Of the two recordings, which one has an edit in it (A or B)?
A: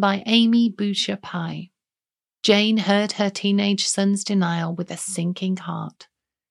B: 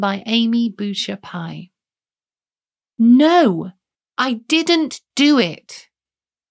A